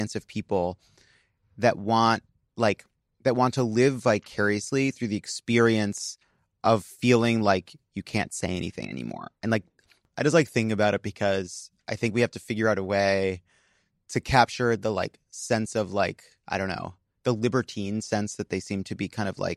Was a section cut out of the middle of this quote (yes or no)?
no